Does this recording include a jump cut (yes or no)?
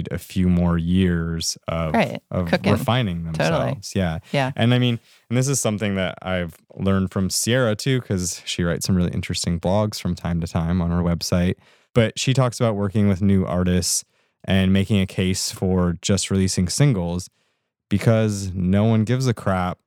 no